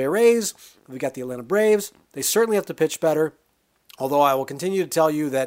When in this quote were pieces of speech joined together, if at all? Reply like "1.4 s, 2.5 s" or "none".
none